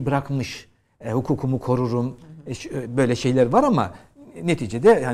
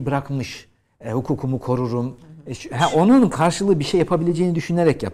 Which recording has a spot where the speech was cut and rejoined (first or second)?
second